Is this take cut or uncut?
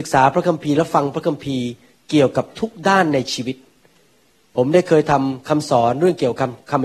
uncut